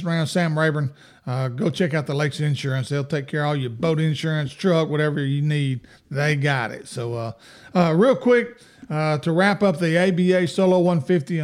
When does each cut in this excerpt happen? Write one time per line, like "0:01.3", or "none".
none